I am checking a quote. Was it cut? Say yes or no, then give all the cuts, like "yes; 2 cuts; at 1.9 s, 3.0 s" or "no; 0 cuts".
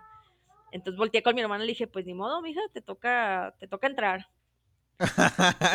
no; 0 cuts